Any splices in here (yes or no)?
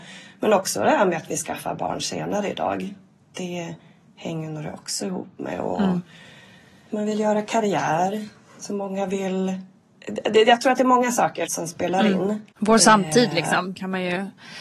yes